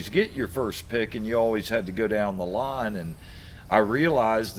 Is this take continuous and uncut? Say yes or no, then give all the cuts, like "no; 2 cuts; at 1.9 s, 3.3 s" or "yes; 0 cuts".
yes; 0 cuts